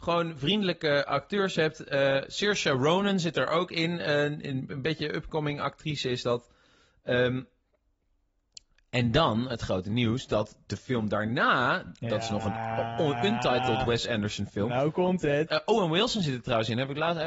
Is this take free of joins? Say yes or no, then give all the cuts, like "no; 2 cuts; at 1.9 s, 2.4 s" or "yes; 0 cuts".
no; 1 cut; at 15.5 s